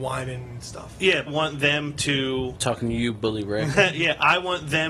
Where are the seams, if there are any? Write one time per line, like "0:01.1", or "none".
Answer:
0:01.3